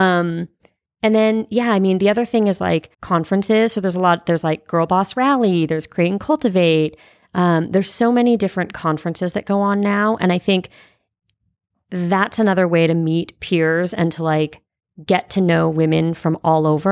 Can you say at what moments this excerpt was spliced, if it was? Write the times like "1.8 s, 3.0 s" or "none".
2.9 s